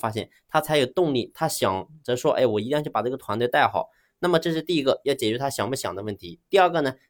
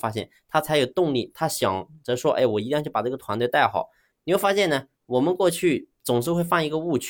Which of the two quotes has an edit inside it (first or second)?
second